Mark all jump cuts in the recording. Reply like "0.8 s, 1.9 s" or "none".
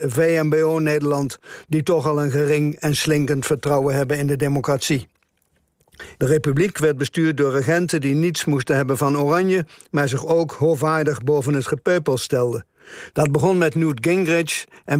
6.1 s, 13.1 s